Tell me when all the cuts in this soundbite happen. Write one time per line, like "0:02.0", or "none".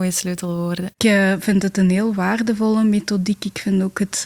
0:00.9